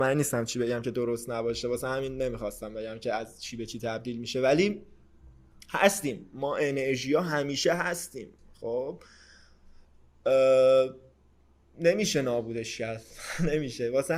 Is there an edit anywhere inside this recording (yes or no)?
no